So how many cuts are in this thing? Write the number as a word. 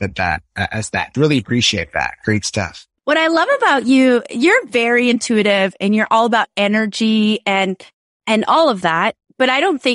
one